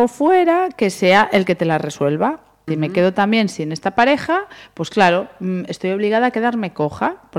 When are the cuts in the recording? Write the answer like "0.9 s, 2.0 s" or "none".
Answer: 2.7 s